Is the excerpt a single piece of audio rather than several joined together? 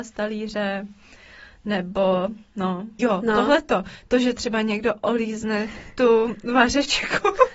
no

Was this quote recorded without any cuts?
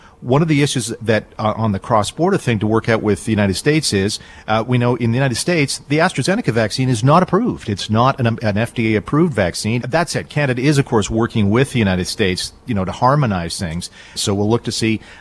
no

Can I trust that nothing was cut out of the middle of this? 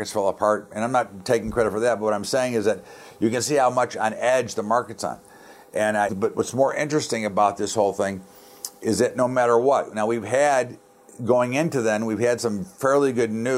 no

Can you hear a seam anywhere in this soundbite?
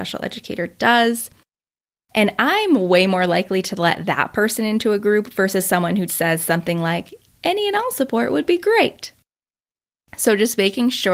yes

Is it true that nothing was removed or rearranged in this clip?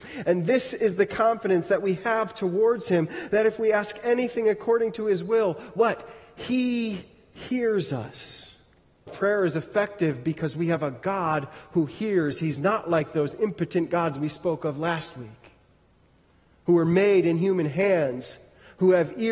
no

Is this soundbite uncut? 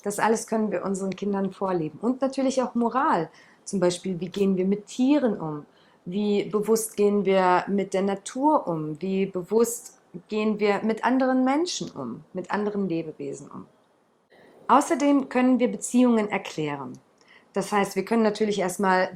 yes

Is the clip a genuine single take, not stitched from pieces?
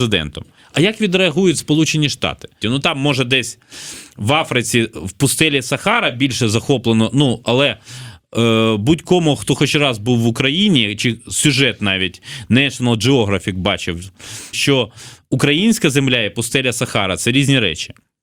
no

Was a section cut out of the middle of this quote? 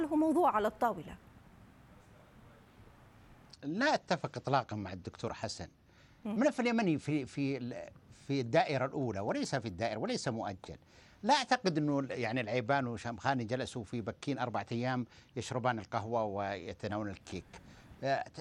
no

